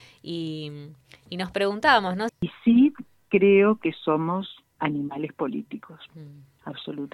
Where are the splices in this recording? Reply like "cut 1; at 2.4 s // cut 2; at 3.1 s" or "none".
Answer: cut 1; at 2.3 s